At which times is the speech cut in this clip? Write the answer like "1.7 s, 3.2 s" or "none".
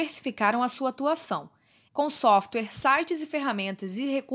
1.9 s

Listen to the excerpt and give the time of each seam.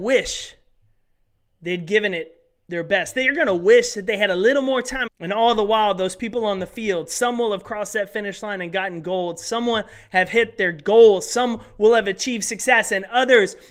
5.1 s

